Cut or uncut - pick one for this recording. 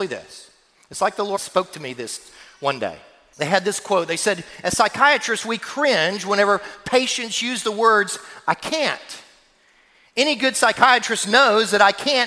cut